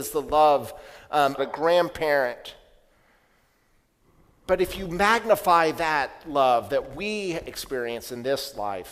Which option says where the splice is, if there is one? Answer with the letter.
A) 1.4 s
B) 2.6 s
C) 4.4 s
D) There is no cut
A